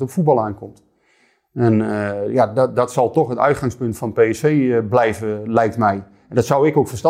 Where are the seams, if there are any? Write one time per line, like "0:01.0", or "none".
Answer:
none